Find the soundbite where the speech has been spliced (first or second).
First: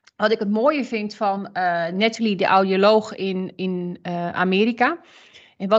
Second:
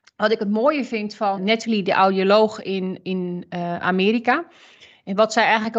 second